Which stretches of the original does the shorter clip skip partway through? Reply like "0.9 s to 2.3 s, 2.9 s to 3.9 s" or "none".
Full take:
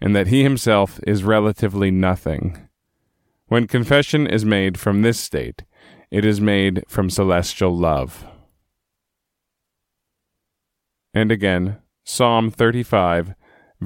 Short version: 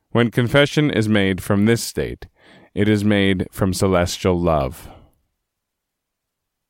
none